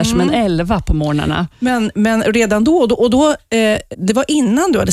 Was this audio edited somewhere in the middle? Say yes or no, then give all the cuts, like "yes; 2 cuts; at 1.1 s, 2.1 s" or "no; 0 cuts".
yes; 1 cut; at 3.9 s